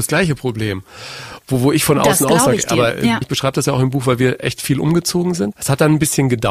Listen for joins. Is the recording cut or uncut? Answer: cut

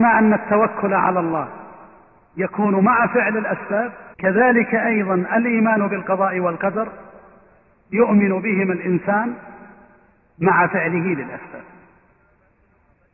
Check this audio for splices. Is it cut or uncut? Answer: cut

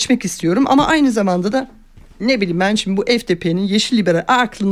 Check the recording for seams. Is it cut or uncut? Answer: uncut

